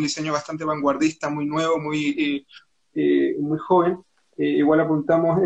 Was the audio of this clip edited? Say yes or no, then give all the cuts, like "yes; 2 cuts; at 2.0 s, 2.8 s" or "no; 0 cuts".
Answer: no; 0 cuts